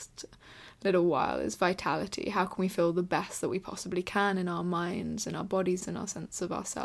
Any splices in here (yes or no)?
yes